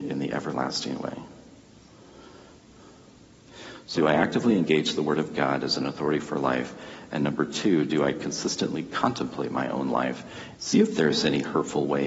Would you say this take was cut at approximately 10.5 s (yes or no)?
yes